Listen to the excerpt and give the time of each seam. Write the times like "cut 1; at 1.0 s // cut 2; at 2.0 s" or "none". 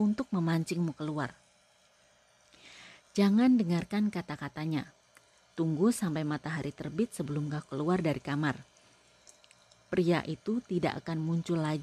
cut 1; at 5.4 s